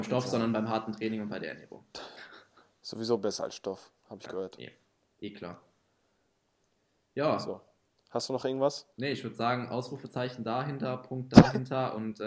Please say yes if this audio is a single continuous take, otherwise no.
no